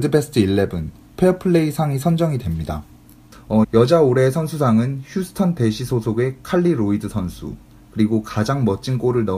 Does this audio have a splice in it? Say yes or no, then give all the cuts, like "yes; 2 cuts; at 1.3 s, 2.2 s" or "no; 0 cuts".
yes; 1 cut; at 3.6 s